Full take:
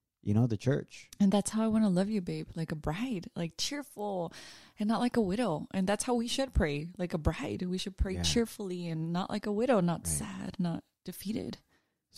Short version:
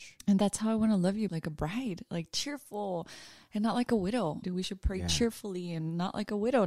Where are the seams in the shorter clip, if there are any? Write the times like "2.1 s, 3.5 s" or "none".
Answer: 1.3 s, 4.4 s